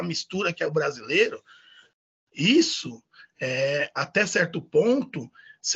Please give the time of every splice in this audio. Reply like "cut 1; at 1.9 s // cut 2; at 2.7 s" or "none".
none